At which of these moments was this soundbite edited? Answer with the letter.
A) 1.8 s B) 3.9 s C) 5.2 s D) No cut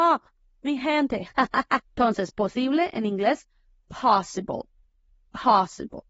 A